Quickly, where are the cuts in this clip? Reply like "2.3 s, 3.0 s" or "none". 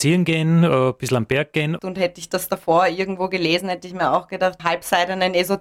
1.8 s, 4.6 s